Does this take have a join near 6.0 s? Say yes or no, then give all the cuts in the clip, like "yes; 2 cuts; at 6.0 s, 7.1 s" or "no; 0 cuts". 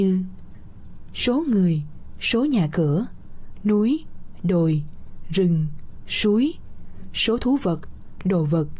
no; 0 cuts